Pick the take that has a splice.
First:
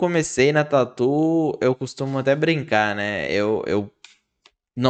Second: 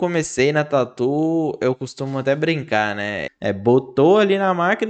second; 1 cut; at 3.3 s

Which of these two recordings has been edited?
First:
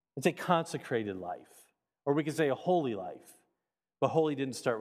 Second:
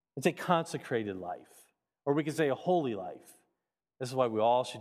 second; 1 cut; at 3.8 s

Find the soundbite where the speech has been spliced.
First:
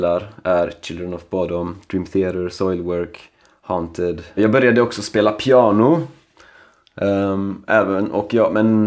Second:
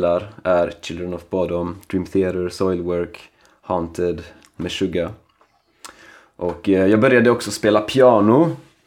first; 1 cut; at 4.4 s

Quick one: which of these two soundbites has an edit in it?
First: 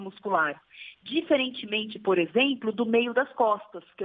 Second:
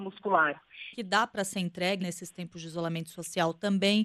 second; 2 cuts; at 0.9 s, 2.0 s

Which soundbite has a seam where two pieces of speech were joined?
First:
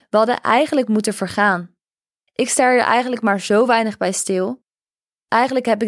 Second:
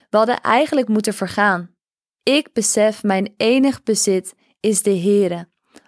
second; 1 cut; at 2.1 s

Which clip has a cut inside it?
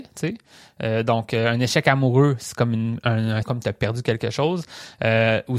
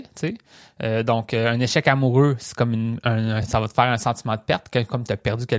first; 1 cut; at 3.4 s

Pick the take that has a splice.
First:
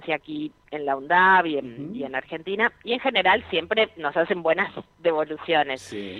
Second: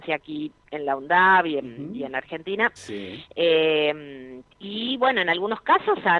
second; 2 cuts; at 2.8 s, 4.5 s

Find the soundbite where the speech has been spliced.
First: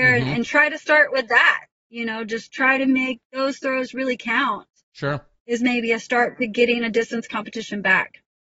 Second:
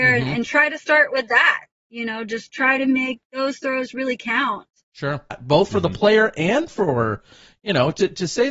second; 1 cut; at 5.3 s

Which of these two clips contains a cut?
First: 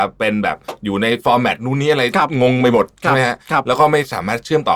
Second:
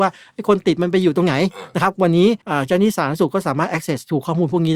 second; 1 cut; at 2.4 s

